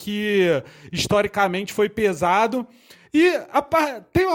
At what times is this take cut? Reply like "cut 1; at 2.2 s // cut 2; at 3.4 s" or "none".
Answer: cut 1; at 3.0 s